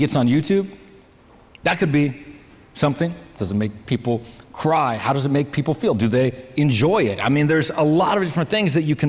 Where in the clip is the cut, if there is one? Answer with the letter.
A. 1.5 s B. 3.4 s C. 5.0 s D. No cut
B